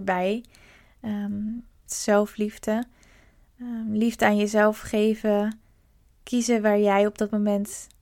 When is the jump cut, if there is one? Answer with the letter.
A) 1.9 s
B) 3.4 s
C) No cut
A